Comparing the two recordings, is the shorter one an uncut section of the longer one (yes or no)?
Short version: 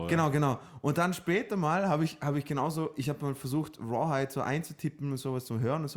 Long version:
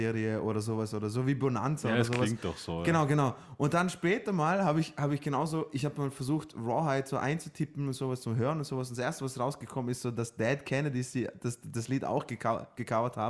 yes